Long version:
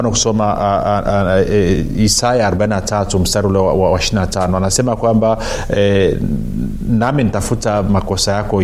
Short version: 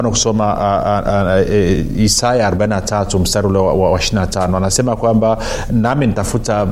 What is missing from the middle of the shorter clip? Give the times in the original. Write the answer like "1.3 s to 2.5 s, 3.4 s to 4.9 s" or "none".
5.7 s to 6.8 s